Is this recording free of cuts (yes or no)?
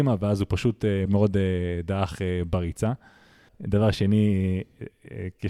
no